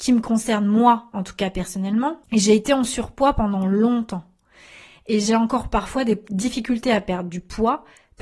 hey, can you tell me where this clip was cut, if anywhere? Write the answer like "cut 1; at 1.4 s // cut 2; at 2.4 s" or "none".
none